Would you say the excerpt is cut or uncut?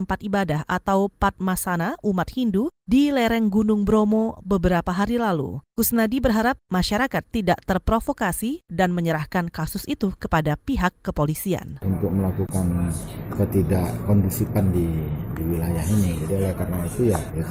uncut